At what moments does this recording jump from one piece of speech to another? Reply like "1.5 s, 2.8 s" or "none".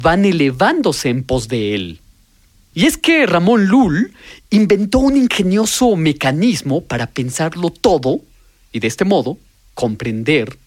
2.7 s